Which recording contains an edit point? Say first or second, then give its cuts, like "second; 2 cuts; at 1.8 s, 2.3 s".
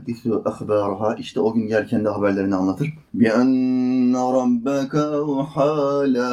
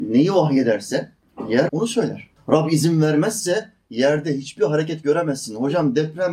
second; 1 cut; at 1.7 s